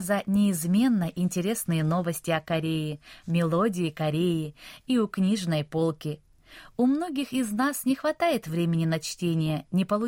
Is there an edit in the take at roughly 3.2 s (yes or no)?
yes